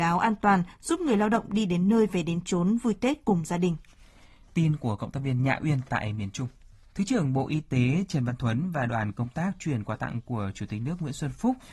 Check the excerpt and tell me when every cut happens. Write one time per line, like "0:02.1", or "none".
0:04.4
0:06.9